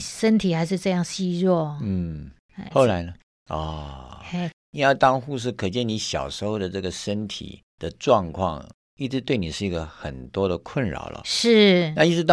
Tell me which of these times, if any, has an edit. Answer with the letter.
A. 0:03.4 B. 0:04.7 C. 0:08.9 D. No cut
A